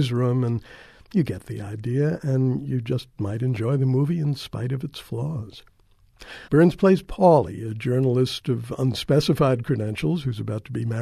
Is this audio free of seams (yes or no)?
no